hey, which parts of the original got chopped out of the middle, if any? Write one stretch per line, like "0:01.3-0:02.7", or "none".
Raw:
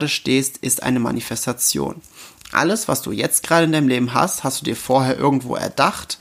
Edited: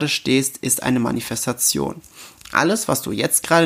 none